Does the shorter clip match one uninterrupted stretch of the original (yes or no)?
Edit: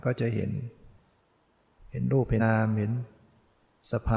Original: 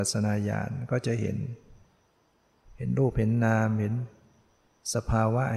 no